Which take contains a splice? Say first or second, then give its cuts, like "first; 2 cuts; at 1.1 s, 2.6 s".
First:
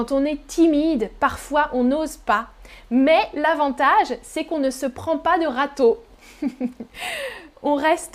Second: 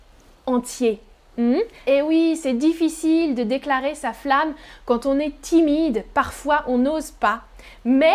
second; 1 cut; at 1.8 s